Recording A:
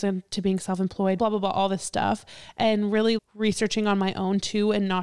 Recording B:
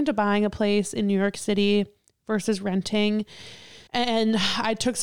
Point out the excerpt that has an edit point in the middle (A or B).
A